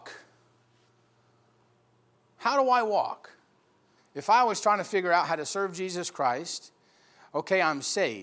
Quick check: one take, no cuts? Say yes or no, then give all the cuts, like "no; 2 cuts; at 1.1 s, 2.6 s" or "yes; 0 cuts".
no; 1 cut; at 4.0 s